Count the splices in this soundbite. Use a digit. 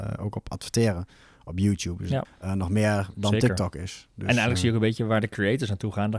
1